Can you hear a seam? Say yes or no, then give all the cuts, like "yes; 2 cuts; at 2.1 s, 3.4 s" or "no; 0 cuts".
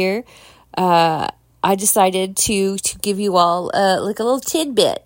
no; 0 cuts